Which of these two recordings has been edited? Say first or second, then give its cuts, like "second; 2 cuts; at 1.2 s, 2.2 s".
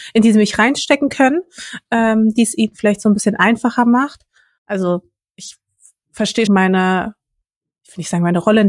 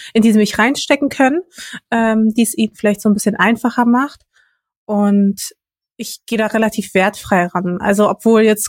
first; 2 cuts; at 4.6 s, 6.5 s